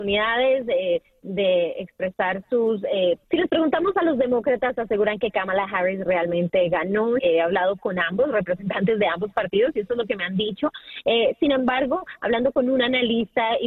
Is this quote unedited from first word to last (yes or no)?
no